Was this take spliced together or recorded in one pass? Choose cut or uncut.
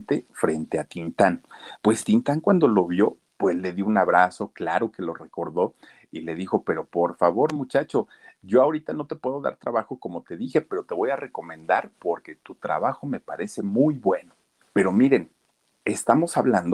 cut